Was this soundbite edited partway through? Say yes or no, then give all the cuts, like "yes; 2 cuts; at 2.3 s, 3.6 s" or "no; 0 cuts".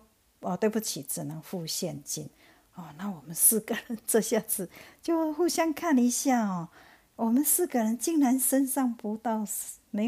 no; 0 cuts